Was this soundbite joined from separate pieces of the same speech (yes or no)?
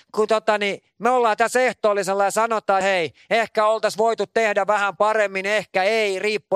yes